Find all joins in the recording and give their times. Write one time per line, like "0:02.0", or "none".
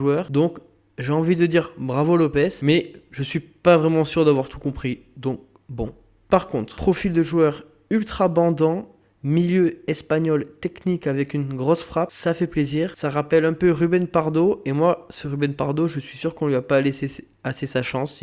none